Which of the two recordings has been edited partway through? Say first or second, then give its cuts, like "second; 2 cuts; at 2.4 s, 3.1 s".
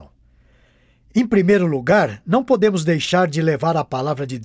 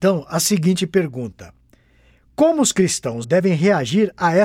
second; 1 cut; at 3.2 s